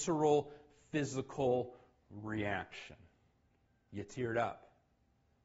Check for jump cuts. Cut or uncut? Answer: uncut